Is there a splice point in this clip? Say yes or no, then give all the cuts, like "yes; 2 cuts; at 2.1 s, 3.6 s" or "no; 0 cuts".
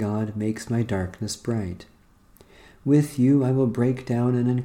no; 0 cuts